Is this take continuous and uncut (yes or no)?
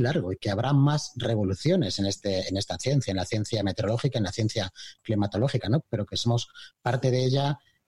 yes